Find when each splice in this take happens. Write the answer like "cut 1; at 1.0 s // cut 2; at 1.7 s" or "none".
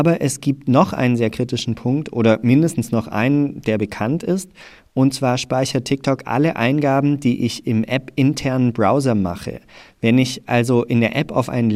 none